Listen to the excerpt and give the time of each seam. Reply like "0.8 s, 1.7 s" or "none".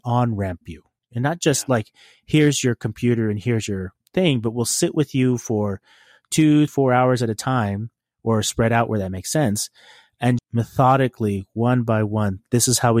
6.7 s, 10.4 s

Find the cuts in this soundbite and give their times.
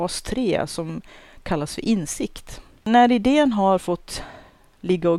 2.8 s

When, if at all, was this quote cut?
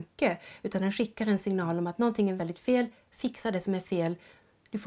2.4 s

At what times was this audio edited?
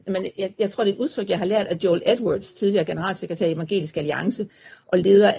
none

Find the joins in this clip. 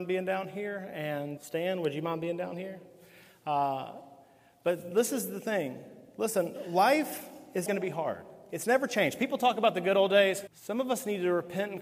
1.4 s, 7.7 s, 10.5 s

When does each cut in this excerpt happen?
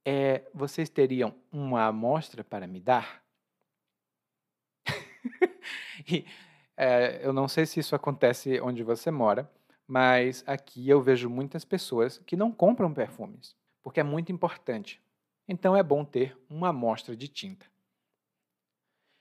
13.7 s, 15.4 s

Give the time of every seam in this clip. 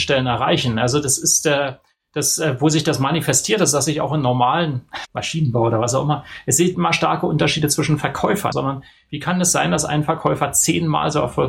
5.1 s, 6.7 s, 8.5 s

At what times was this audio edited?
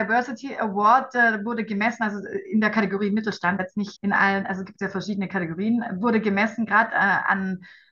4.0 s

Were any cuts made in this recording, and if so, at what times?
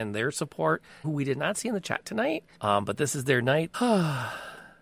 1.0 s, 2.5 s, 3.7 s

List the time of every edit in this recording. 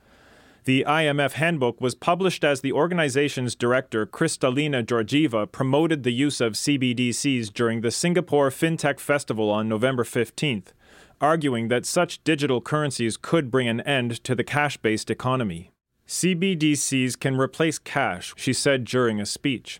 18.3 s

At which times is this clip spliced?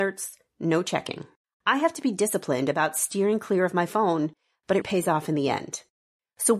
1.4 s, 4.8 s

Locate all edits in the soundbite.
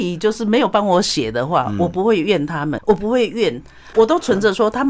2.8 s

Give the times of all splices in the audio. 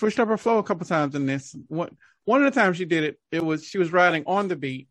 none

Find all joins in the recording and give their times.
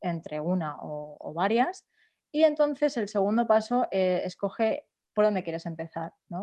none

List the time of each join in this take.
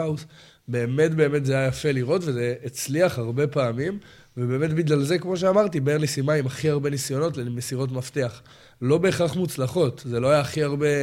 none

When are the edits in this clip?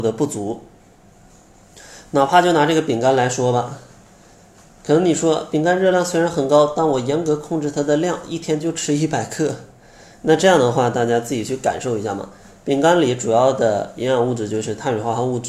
none

